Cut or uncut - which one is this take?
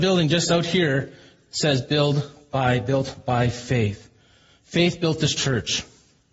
uncut